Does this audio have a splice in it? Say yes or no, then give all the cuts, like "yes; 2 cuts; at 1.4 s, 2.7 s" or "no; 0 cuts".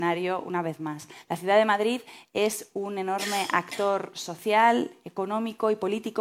no; 0 cuts